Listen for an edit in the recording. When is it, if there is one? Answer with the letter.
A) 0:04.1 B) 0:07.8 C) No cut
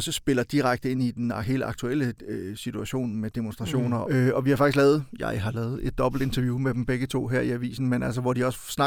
A